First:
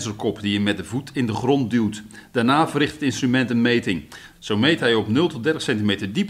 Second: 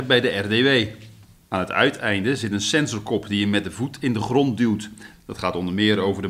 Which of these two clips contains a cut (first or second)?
second